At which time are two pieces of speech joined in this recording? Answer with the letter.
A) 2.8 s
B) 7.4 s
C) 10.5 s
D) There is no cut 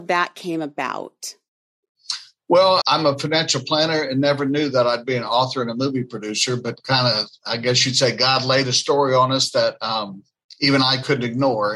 A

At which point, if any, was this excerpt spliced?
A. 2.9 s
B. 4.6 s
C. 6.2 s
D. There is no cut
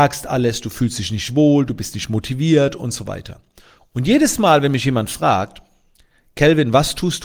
D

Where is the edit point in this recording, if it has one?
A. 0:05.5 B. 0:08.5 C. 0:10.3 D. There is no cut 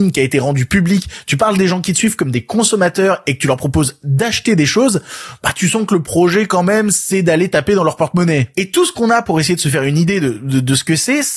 D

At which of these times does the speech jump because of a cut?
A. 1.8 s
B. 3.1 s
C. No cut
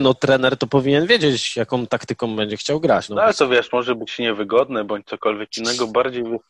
B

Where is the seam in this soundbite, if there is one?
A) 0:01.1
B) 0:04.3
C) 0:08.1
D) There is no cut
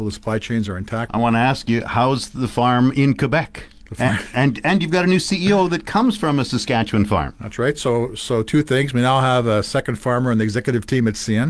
A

